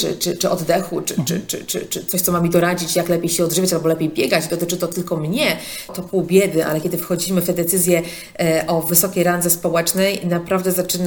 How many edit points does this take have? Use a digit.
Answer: 1